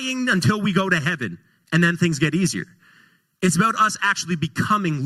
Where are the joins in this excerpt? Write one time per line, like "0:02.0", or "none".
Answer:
none